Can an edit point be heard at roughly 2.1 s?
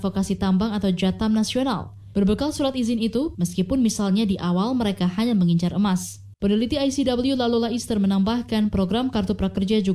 yes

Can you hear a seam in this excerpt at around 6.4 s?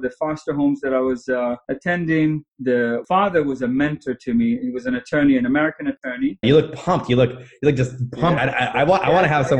yes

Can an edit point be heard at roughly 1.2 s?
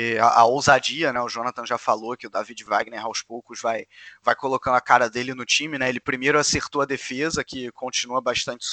no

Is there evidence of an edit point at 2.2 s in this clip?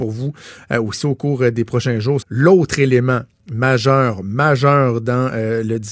yes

